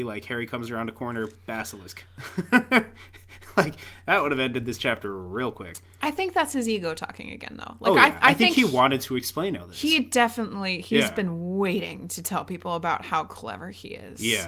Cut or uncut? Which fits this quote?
uncut